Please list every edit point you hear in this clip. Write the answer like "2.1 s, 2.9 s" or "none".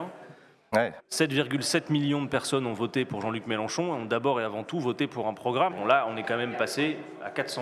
1.0 s, 5.7 s